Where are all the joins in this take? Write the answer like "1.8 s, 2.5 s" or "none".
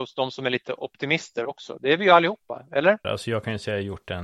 3.0 s